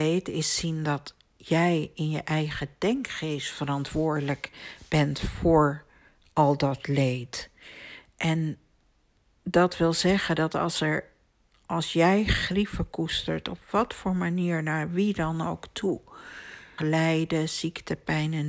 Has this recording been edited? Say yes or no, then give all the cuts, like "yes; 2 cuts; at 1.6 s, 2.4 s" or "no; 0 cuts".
yes; 1 cut; at 16.8 s